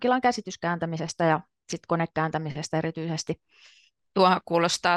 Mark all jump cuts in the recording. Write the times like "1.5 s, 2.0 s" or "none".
4.0 s

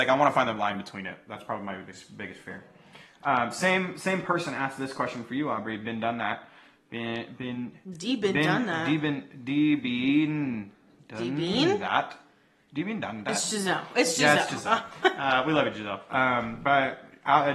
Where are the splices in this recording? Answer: none

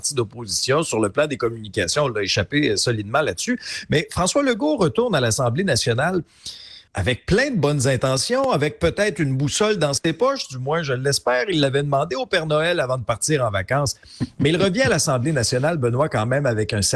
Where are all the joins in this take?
6.9 s

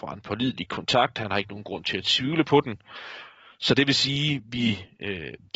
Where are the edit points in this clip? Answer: none

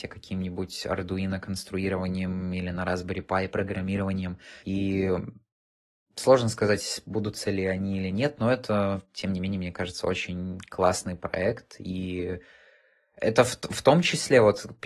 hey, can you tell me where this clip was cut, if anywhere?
4.6 s

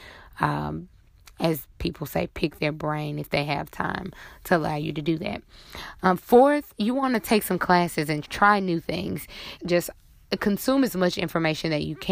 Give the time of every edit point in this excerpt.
8.2 s, 9.6 s

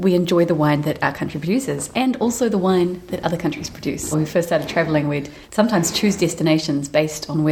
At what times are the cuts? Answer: 4.1 s, 5.4 s

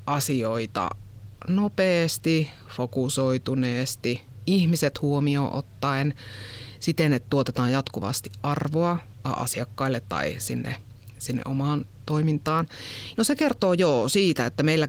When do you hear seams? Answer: 13.1 s

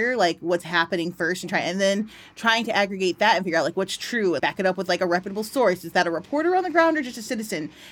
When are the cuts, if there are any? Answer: 4.4 s

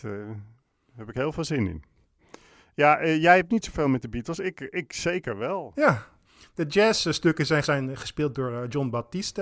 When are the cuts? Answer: 5.7 s, 7.6 s

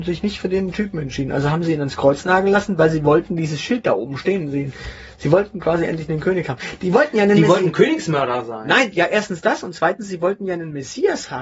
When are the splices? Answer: none

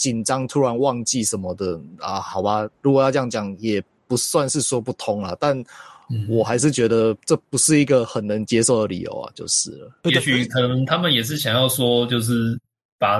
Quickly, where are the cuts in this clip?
7.2 s, 10.0 s

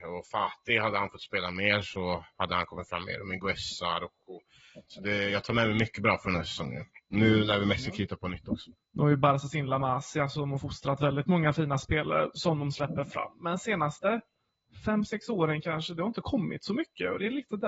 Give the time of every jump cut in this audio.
8.8 s

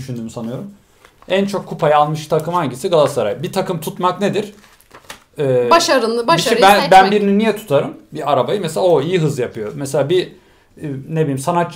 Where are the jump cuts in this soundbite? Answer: none

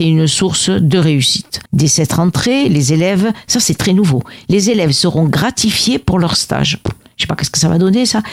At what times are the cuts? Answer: 1.7 s

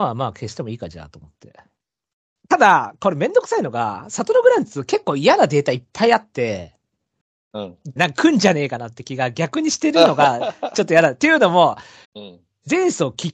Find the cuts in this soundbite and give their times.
8.0 s, 12.0 s

